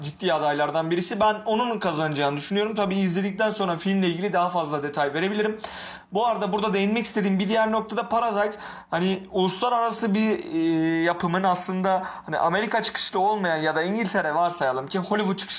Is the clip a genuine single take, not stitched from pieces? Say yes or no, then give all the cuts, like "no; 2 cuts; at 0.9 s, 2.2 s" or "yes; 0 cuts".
yes; 0 cuts